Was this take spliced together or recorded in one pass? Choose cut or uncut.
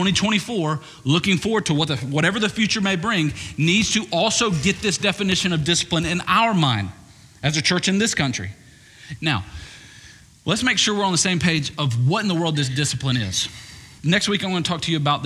cut